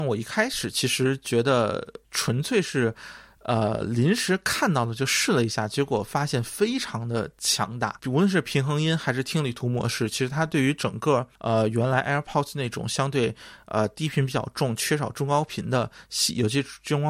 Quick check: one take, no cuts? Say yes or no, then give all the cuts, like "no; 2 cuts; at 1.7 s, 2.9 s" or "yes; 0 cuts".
yes; 0 cuts